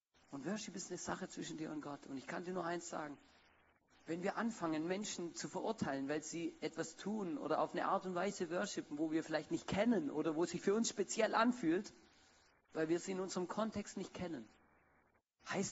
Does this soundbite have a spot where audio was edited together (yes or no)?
no